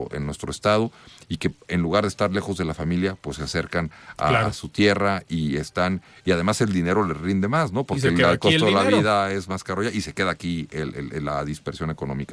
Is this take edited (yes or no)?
no